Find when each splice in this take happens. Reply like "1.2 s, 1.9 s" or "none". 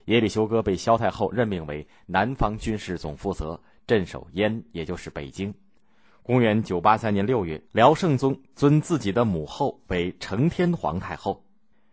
6.0 s, 7.7 s

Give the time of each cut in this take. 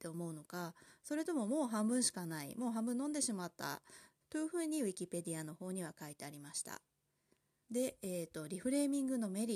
4.2 s, 7.6 s

